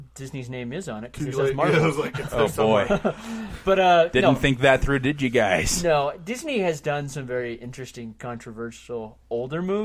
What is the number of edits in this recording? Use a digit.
0